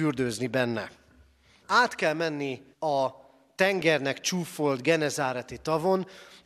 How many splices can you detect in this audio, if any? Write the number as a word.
two